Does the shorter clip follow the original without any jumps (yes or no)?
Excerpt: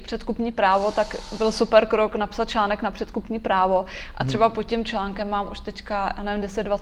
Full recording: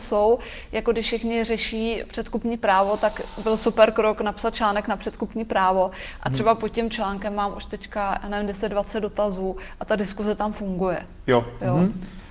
yes